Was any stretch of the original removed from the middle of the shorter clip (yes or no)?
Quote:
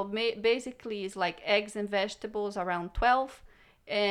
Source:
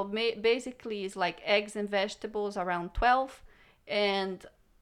no